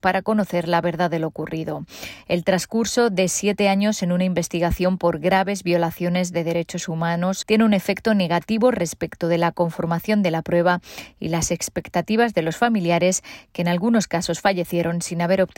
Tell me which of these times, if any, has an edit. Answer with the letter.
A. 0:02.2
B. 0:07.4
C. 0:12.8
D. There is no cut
B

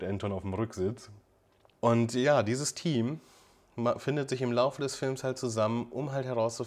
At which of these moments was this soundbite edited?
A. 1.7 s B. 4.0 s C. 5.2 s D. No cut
A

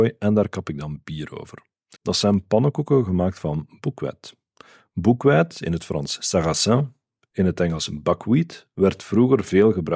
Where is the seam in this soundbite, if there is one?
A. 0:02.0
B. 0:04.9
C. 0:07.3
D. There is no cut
A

